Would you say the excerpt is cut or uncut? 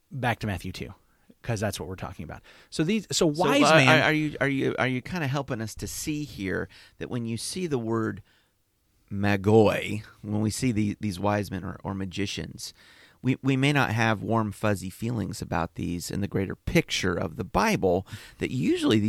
uncut